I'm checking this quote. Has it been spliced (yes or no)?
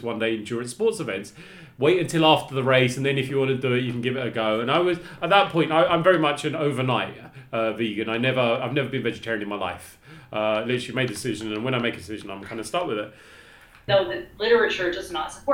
yes